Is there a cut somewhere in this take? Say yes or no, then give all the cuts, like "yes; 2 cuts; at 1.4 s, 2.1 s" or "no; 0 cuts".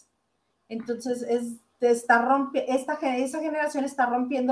no; 0 cuts